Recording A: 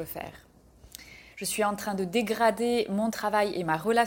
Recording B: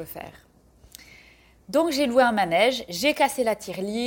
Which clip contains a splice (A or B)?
A